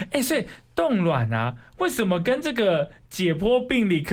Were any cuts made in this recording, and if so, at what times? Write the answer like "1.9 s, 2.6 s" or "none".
none